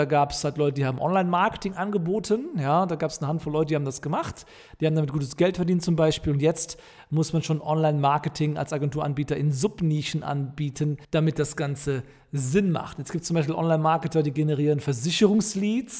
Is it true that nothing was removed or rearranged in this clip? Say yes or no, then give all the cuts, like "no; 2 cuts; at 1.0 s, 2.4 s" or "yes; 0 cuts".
no; 1 cut; at 11.0 s